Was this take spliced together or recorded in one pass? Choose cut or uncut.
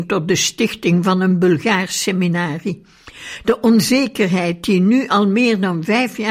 uncut